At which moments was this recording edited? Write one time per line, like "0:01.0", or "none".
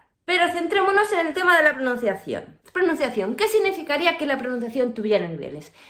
0:02.6